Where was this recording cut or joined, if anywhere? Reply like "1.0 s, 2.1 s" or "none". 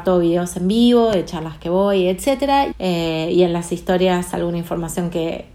2.7 s